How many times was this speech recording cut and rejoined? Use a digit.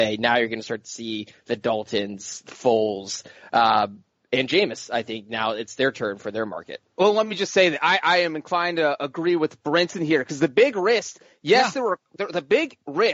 0